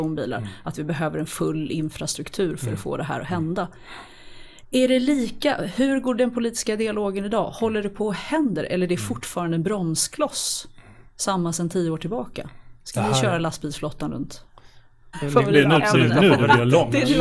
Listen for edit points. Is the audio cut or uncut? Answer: cut